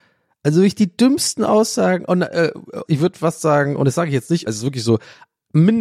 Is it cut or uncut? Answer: cut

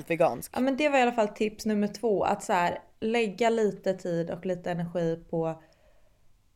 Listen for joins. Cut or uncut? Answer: uncut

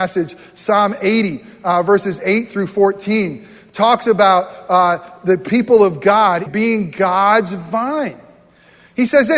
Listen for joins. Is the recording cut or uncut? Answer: cut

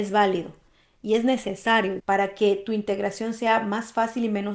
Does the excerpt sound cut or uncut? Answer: cut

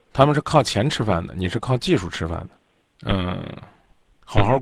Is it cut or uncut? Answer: cut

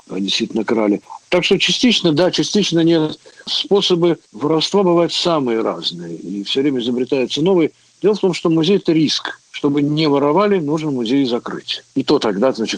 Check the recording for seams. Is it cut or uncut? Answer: uncut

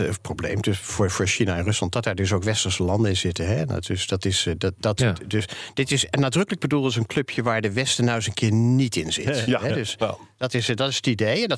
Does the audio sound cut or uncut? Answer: uncut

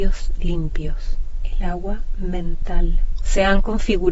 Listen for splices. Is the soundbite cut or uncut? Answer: uncut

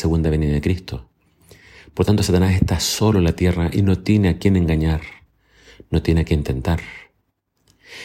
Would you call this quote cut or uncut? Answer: uncut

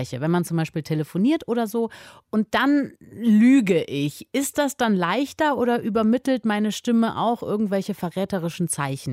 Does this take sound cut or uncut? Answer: uncut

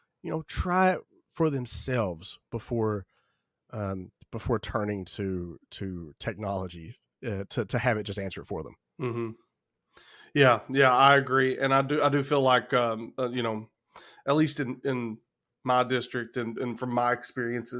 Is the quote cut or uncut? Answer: uncut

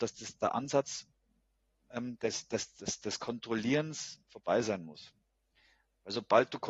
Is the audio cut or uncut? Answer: uncut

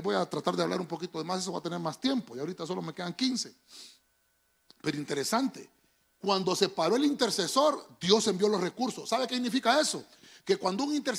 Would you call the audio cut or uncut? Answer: uncut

